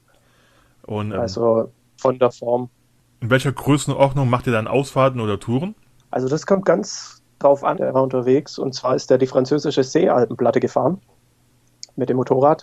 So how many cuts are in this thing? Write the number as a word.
two